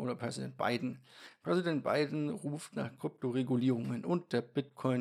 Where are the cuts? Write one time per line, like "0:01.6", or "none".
none